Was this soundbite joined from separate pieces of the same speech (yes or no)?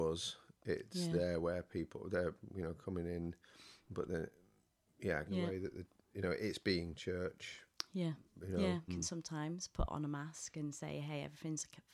yes